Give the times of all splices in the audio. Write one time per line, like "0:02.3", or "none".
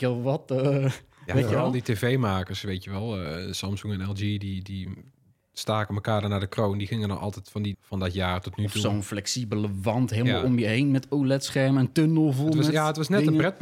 0:07.7